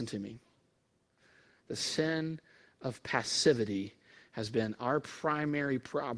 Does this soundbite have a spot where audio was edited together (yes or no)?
no